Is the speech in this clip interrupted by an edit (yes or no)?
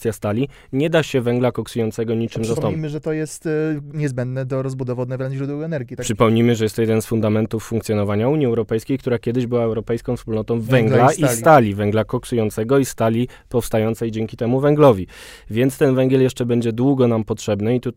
no